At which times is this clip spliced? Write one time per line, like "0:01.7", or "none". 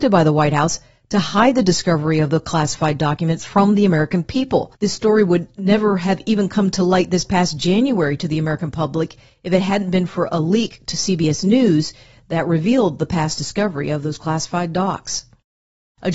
none